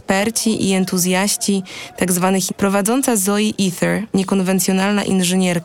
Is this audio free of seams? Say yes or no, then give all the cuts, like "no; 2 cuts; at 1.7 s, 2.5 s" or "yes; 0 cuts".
no; 2 cuts; at 2.5 s, 4.1 s